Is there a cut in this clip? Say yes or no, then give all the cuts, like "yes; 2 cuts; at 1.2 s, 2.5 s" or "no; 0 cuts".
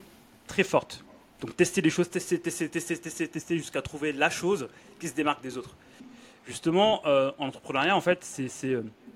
yes; 1 cut; at 6.0 s